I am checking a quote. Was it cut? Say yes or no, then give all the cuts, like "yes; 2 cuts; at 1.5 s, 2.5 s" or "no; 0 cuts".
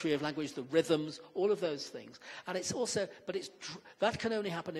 no; 0 cuts